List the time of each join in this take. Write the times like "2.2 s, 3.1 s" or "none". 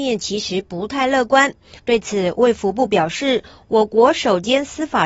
1.8 s

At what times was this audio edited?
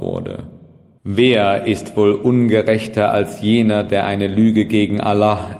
1.0 s

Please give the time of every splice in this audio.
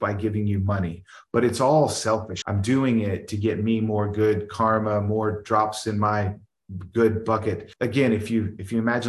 2.4 s, 7.7 s

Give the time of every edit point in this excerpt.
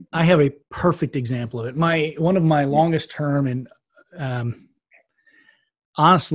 none

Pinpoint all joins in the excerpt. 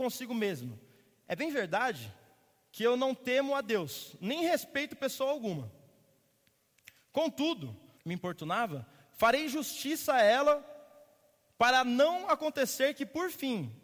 8.0 s

